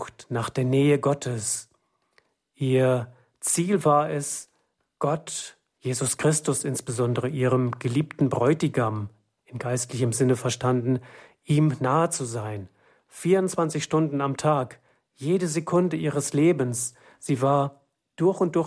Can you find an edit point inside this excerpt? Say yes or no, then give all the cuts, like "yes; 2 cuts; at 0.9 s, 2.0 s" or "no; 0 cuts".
no; 0 cuts